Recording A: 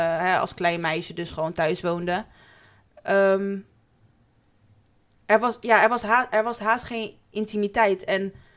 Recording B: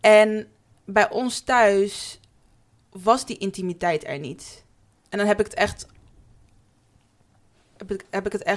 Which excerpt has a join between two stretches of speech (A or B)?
B